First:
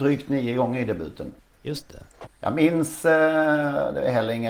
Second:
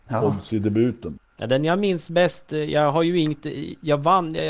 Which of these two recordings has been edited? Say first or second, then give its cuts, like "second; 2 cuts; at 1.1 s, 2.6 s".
first; 1 cut; at 2.2 s